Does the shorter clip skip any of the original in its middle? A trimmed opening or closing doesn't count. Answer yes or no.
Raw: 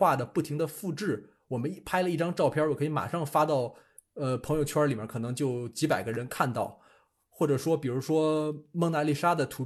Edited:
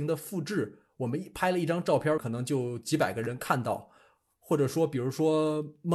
yes